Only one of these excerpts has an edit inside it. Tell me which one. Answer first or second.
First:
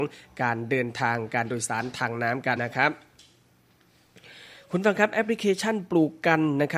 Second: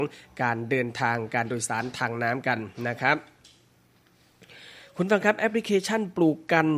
first